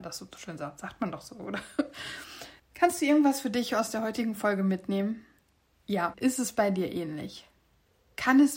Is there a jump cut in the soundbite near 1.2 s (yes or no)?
no